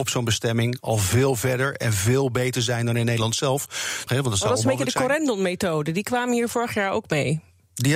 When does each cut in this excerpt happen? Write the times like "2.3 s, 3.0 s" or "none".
4.1 s